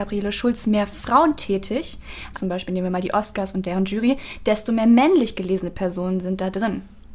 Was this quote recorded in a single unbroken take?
no; 1 cut; at 2.3 s

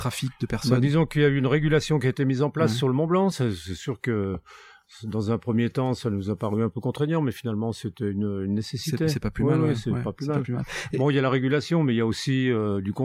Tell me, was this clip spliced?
no; 0 cuts

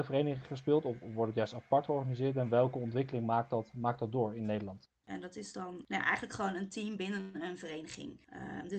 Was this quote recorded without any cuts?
no; 1 cut; at 5.0 s

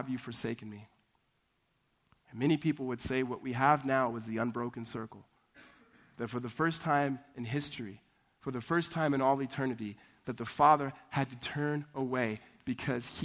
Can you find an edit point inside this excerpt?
no; 0 cuts

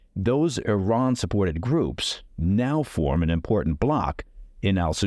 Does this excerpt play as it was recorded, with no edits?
yes; 0 cuts

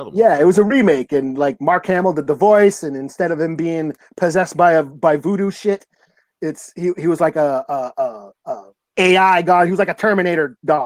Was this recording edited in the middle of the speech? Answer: yes; 1 cut; at 8.9 s

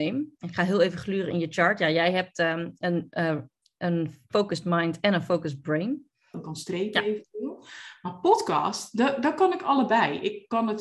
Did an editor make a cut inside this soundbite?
yes; 1 cut; at 6.3 s

